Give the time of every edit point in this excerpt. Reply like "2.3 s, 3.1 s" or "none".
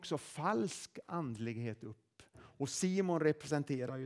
2.3 s

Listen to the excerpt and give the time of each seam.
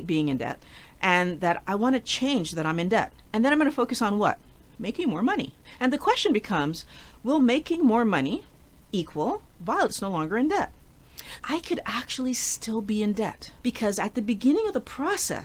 11.4 s, 13.6 s

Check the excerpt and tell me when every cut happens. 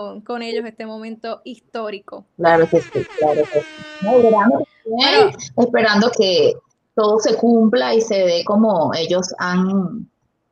4.2 s, 6.1 s

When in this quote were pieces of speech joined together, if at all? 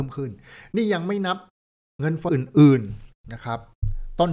2.3 s

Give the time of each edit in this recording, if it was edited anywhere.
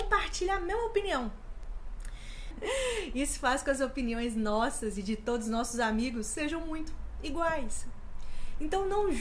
2.5 s

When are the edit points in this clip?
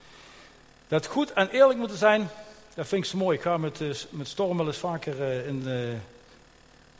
none

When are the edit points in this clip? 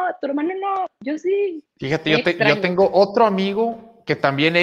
1.7 s

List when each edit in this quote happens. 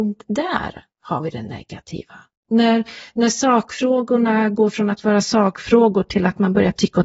2.3 s

